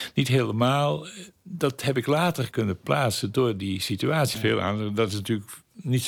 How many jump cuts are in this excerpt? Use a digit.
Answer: 2